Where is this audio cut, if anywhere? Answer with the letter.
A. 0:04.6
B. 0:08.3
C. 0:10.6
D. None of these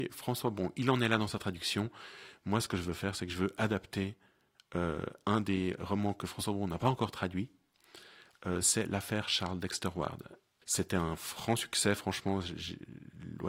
C